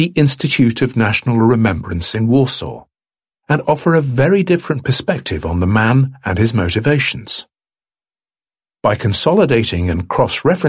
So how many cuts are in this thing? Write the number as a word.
zero